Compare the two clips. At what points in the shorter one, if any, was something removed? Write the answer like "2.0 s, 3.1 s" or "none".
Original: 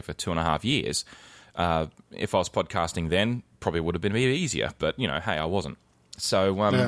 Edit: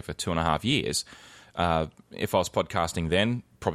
none